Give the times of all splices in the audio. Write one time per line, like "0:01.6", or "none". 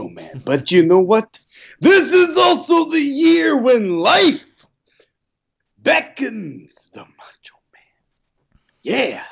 none